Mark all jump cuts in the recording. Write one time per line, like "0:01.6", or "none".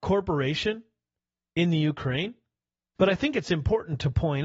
0:03.0